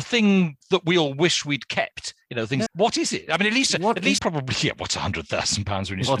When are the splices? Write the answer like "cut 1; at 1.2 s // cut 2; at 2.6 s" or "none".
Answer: cut 1; at 2.7 s // cut 2; at 4.2 s